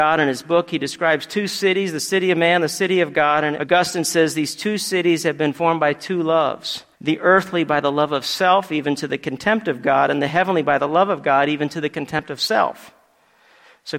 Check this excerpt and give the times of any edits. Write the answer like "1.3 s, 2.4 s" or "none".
3.6 s, 6.9 s